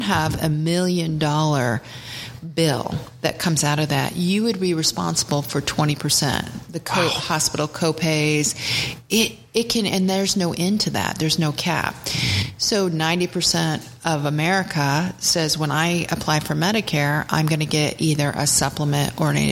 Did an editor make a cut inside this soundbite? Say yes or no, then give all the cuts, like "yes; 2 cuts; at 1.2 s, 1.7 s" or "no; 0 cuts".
no; 0 cuts